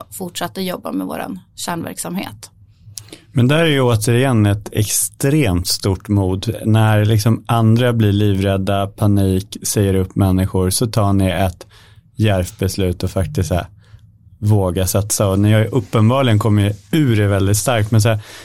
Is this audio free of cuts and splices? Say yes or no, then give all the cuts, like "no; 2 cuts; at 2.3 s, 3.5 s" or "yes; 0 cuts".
yes; 0 cuts